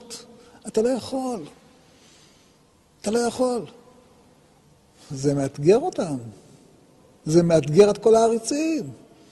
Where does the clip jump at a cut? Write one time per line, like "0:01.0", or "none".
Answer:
none